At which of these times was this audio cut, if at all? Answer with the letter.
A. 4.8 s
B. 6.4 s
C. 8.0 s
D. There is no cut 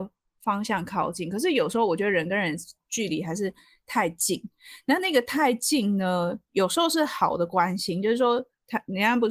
D